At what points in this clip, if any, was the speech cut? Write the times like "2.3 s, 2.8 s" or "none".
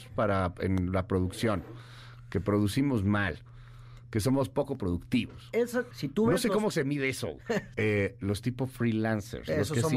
5.9 s, 7.7 s